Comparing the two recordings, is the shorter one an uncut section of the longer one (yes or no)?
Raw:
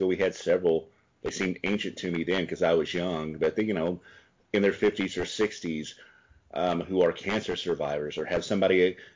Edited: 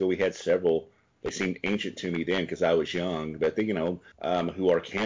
no